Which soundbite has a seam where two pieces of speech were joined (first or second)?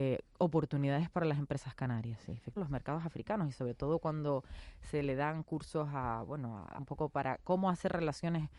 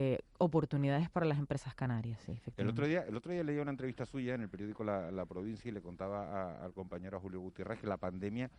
first